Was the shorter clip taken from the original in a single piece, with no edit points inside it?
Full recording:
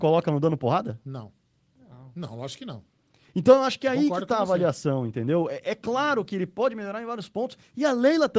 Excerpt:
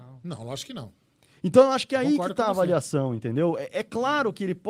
yes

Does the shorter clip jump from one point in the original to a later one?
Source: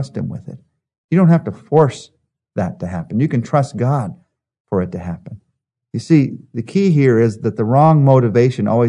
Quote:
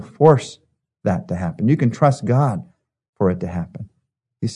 no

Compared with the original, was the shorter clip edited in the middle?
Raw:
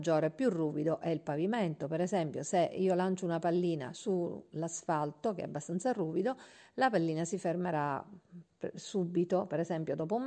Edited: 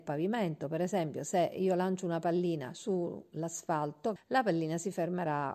yes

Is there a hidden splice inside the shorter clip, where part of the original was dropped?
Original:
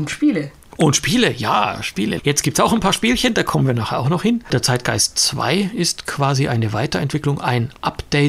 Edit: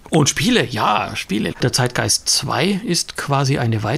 yes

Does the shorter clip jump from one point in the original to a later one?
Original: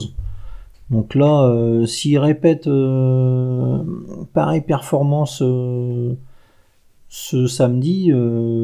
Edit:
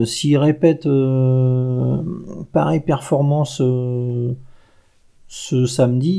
no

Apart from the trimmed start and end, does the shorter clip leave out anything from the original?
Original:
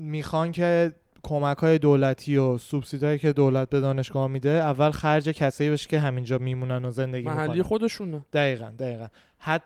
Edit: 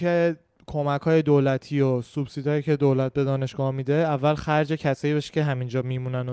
no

